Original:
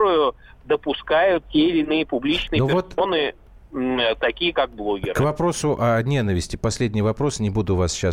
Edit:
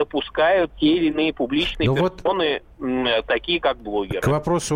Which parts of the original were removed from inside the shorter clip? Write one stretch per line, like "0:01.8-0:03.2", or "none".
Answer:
0:03.4-0:03.6